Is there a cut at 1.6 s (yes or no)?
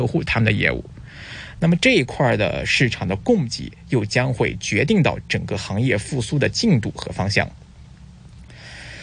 yes